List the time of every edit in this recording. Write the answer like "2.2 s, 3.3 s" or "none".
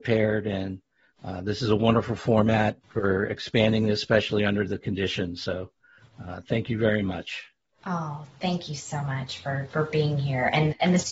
2.8 s